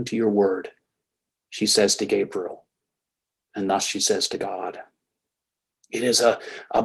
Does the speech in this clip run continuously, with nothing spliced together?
yes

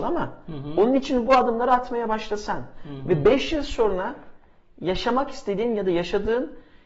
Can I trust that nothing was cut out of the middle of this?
yes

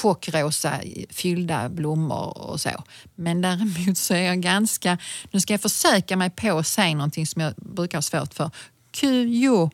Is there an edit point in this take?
no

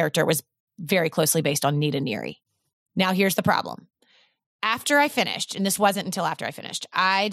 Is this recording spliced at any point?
no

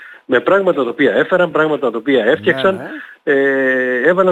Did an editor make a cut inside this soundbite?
no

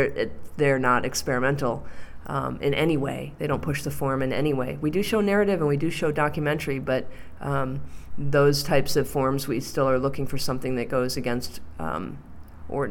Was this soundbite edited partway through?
no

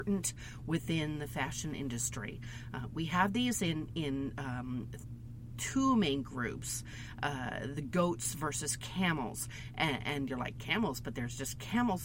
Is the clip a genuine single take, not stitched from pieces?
yes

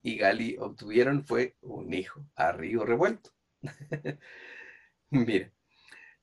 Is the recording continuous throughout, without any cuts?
no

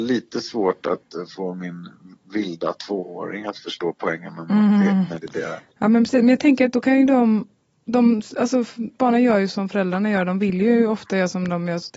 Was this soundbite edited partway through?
no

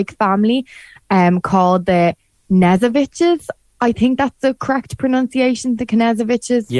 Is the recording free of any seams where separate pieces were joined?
yes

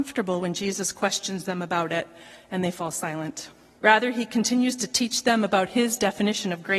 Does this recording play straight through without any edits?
no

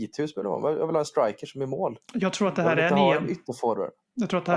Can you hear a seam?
no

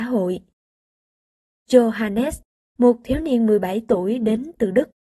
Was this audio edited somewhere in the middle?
no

